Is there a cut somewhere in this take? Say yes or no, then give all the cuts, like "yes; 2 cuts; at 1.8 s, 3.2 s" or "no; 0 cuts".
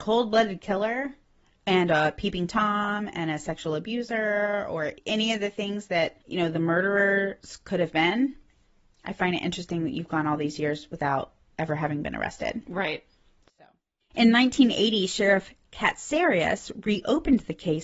no; 0 cuts